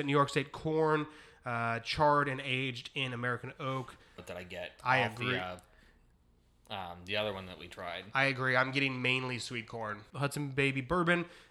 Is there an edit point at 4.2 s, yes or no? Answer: yes